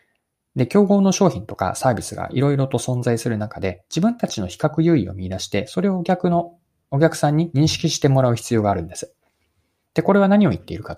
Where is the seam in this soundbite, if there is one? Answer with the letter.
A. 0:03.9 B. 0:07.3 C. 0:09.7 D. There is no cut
D